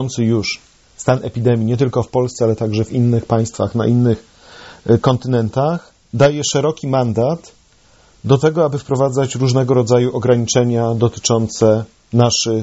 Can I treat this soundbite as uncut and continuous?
yes; 0 cuts

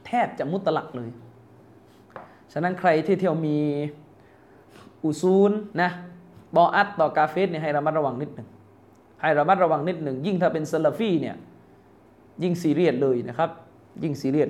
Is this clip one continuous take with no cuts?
no; 1 cut; at 5.7 s

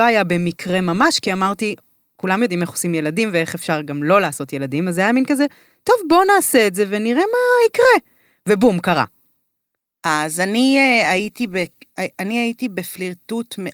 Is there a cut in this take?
no; 0 cuts

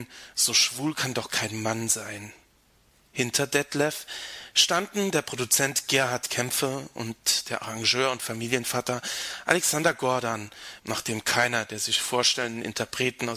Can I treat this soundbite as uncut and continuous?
no; 1 cut; at 10.8 s

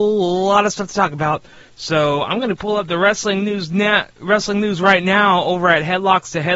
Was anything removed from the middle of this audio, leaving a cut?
no; 0 cuts

